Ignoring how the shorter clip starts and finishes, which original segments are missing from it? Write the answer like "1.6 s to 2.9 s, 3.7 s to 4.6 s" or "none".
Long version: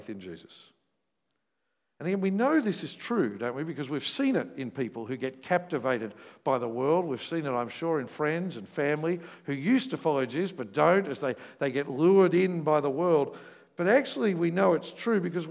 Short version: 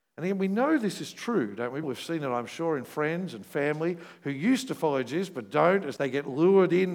3.7 s to 7.1 s, 11.2 s to 11.6 s